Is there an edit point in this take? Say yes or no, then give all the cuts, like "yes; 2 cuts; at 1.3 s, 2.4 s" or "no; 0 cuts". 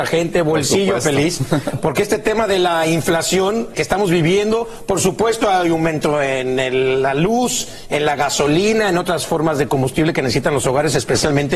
yes; 1 cut; at 3.7 s